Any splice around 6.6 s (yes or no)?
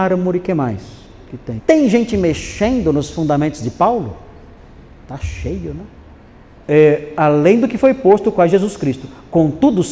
yes